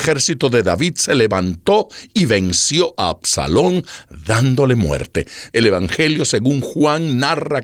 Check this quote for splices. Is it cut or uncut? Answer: cut